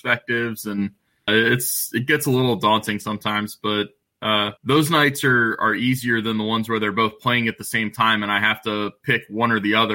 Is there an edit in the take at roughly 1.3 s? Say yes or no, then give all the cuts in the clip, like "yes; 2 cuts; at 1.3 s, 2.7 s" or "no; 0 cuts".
yes; 2 cuts; at 1.3 s, 4.6 s